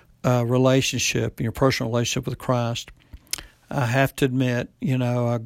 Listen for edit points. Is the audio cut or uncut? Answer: uncut